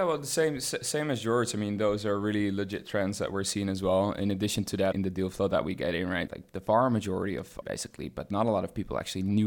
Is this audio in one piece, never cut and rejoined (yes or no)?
no